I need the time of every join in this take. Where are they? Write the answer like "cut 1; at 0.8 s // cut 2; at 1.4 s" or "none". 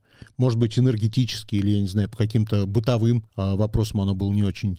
cut 1; at 3.3 s